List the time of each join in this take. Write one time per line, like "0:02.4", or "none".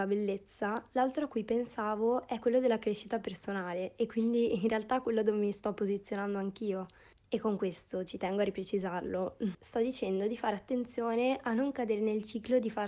0:07.2
0:09.5